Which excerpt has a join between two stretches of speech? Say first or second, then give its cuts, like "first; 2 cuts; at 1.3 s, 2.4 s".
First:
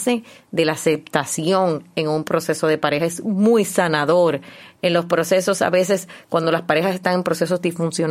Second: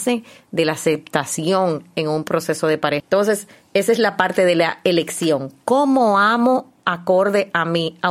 second; 1 cut; at 3.0 s